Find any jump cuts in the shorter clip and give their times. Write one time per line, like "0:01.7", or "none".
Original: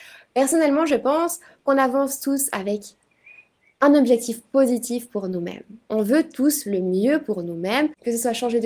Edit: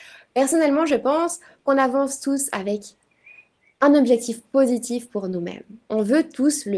none

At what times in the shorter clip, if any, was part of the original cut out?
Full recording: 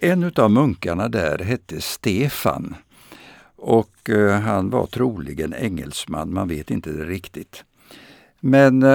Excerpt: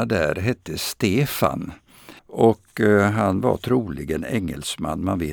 0:02.2

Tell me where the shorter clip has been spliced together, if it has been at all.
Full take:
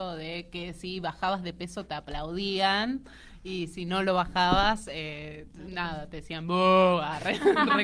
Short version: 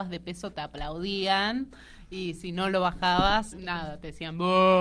0:03.5

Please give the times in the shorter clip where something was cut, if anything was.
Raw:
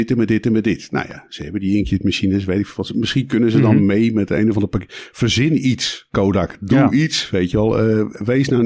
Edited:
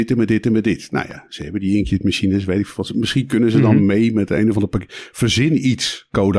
none

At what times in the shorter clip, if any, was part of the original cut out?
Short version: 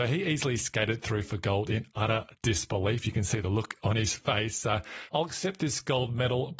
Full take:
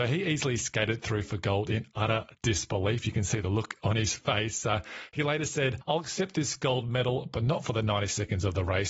0:05.1

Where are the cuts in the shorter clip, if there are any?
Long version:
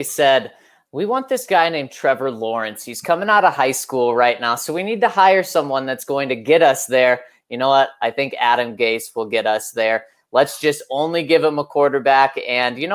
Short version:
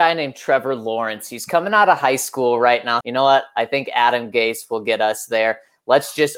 0:03.0

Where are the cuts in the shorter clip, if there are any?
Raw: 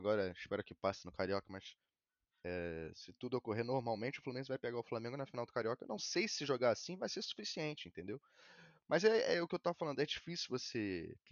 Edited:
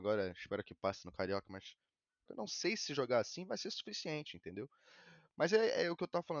0:02.3

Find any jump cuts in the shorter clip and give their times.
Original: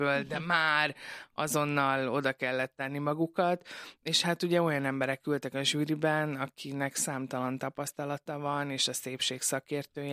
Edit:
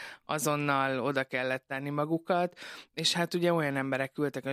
none

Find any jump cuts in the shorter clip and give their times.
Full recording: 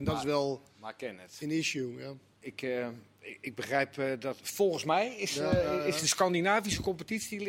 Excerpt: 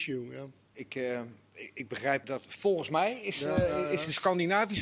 0:02.2

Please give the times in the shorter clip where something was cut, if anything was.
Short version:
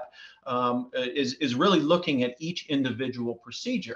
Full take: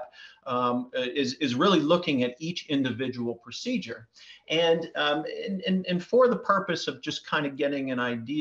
none

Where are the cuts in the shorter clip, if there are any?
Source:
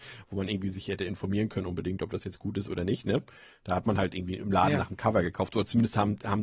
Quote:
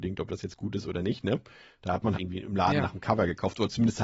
0:02.1

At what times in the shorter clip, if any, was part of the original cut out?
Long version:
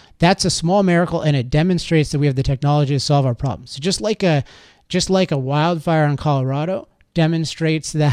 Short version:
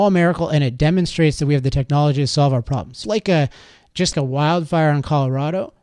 0:03.0
0:04.1

